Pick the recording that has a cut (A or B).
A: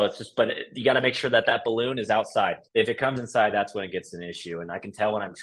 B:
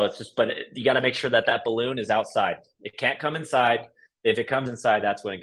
A